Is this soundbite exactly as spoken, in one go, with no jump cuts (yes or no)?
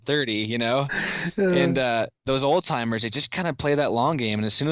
yes